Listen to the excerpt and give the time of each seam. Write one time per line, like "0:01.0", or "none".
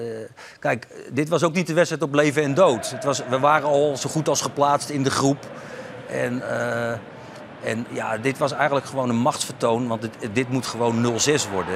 0:07.9